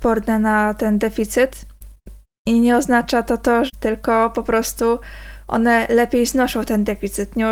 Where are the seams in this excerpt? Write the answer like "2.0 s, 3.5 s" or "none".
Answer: 3.7 s